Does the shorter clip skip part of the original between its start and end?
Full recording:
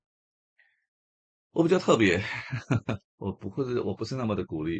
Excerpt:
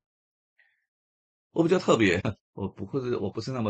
yes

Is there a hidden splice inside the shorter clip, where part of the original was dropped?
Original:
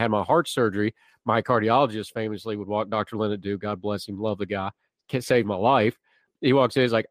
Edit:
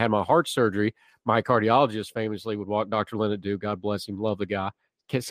no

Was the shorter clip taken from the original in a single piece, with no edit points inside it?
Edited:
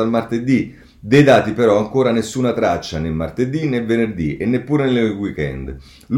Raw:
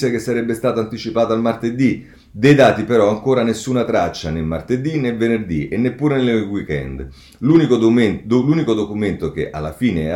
yes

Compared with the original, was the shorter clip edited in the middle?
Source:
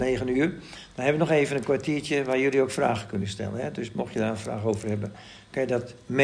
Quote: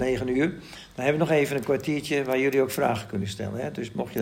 no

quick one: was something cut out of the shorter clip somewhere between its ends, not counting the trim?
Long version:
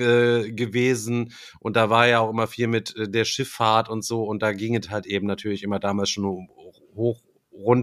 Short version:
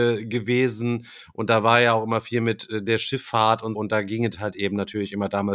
yes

